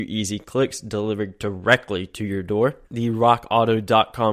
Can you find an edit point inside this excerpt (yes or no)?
yes